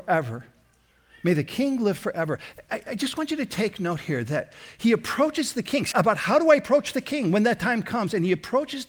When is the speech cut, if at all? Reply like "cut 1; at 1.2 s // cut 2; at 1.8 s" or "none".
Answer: cut 1; at 5.9 s